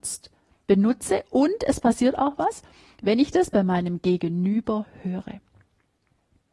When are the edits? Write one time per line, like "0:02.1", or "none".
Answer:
none